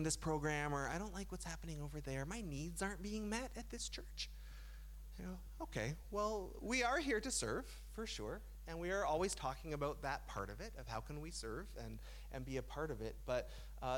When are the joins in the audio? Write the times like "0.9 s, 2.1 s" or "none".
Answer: none

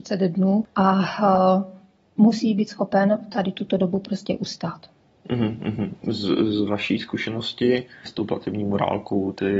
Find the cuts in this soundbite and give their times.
8.0 s

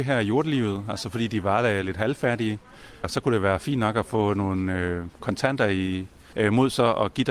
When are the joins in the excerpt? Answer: 3.0 s, 6.3 s

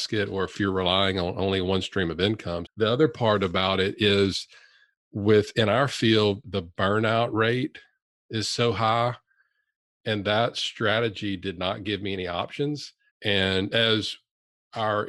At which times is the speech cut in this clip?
2.7 s, 10.0 s, 13.1 s

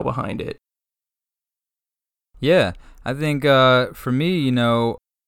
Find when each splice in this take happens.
none

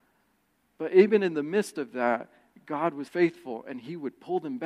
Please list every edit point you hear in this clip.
3.1 s

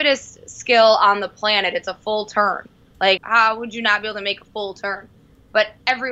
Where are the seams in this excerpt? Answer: 3.2 s

